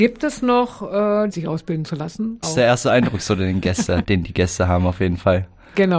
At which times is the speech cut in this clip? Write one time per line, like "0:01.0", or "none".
0:01.3
0:02.4
0:04.0